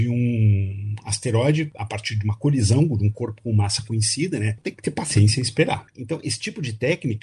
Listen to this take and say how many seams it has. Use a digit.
2